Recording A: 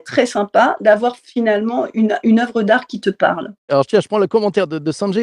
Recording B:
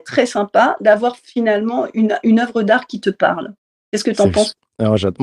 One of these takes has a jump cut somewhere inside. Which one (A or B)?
A